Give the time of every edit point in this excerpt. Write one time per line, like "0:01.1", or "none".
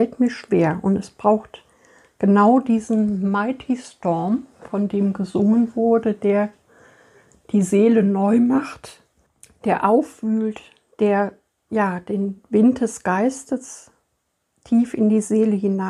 none